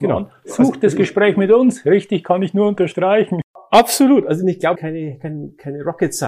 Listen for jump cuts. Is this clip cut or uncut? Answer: cut